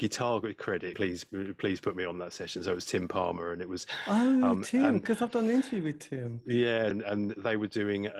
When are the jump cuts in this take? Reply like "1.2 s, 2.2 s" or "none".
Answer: 0.9 s, 6.9 s